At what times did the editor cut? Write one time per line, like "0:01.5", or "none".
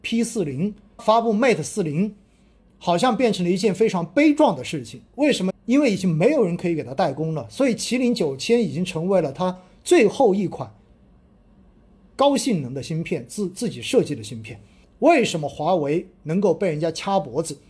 0:01.0
0:05.5
0:14.8